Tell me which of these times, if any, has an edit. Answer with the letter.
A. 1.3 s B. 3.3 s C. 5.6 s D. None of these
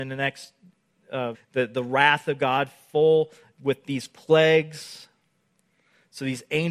A